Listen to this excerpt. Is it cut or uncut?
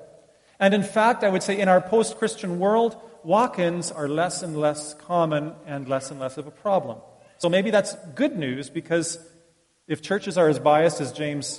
uncut